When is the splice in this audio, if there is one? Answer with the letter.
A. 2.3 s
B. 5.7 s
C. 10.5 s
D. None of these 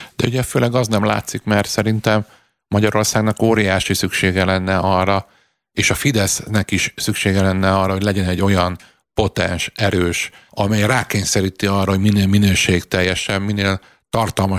C